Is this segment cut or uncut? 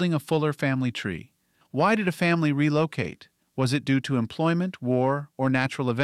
cut